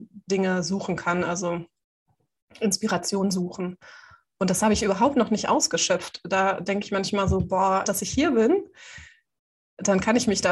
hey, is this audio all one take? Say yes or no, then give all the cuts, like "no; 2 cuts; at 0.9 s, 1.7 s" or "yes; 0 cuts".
no; 1 cut; at 7.8 s